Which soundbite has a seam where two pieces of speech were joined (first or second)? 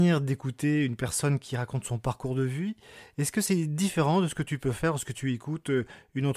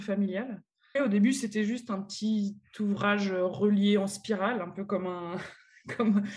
second